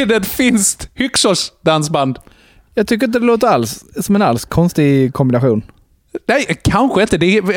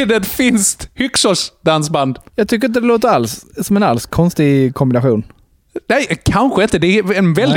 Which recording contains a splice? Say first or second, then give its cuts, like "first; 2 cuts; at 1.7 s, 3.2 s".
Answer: second; 1 cut; at 2.3 s